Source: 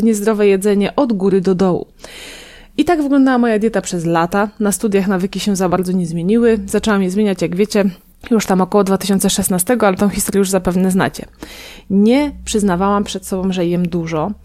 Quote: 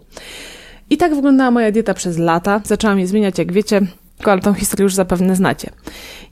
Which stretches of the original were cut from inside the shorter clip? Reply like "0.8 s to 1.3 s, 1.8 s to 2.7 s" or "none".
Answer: 4.5 s to 6.7 s, 8.3 s to 9.8 s